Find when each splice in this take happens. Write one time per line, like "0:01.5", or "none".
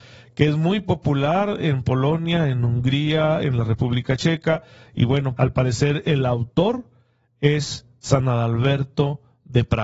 0:05.4